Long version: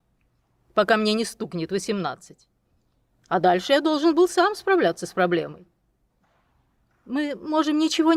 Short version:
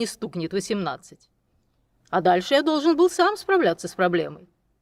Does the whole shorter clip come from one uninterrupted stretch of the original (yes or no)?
yes